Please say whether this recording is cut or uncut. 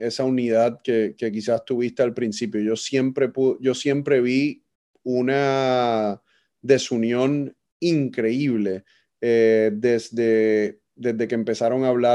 uncut